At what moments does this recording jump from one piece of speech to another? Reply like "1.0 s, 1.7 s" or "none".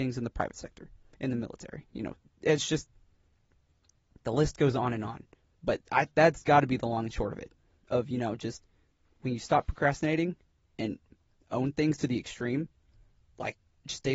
none